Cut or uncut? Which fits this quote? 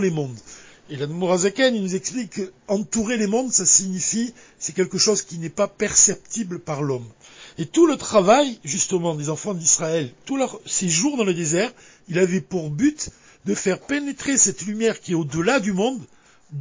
uncut